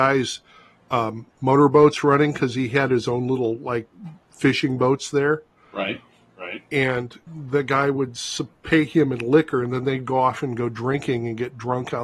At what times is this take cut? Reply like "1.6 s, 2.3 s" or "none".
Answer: 7.3 s